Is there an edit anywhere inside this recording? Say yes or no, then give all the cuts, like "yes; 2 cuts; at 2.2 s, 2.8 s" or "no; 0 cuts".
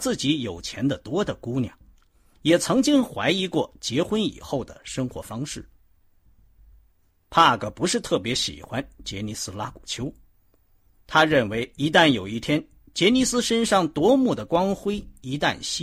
no; 0 cuts